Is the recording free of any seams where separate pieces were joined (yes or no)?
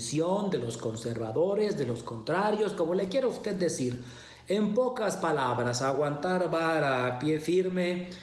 yes